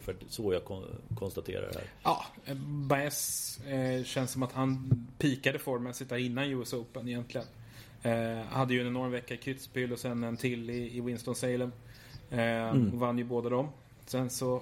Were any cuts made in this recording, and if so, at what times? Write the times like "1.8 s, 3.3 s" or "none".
4.5 s